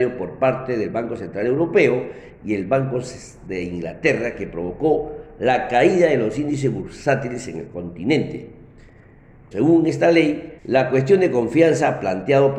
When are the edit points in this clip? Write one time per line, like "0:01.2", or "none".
0:09.5
0:10.6